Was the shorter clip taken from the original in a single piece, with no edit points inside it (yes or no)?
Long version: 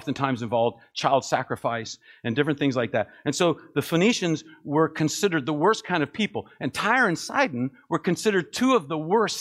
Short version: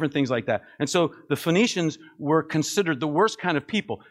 yes